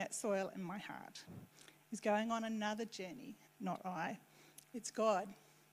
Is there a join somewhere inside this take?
yes; 2 cuts; at 3.4 s, 4.6 s

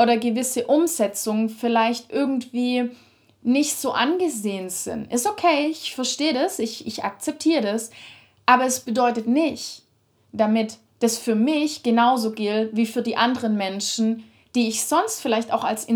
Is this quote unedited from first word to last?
yes; 0 cuts

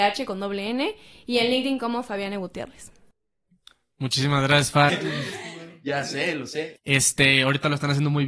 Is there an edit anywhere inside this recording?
yes; 2 cuts; at 4.9 s, 6.8 s

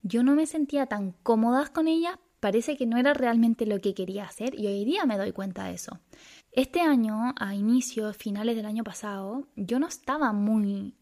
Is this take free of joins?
no; 2 cuts; at 6.4 s, 9.6 s

